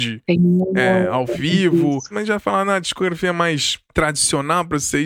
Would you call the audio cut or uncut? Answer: cut